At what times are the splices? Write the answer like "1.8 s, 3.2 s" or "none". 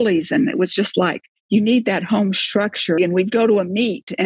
3.0 s

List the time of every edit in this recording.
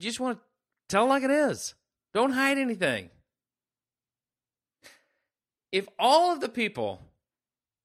none

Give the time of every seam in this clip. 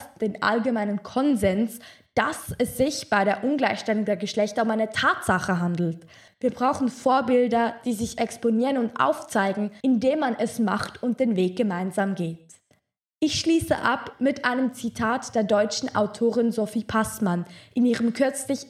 6.3 s, 9.8 s

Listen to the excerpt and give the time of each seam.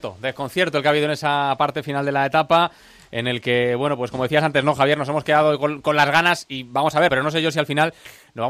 7.1 s

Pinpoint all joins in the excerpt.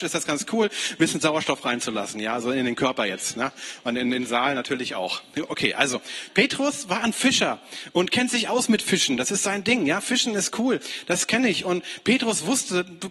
none

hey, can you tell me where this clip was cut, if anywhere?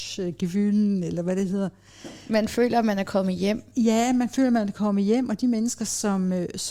none

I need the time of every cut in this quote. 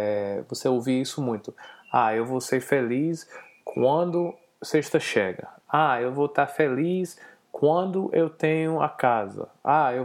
5.6 s

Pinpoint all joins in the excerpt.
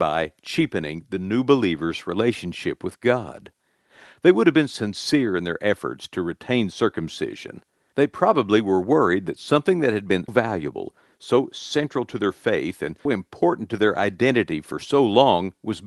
7.9 s, 10.3 s, 13.1 s

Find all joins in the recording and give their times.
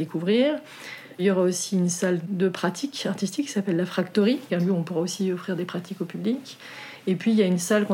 4.5 s

